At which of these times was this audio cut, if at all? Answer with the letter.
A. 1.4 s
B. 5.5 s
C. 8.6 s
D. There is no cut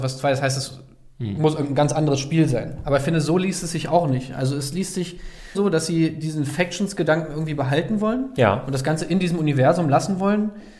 B